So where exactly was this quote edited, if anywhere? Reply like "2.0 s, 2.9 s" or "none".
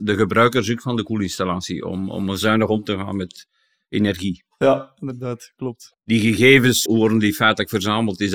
6.9 s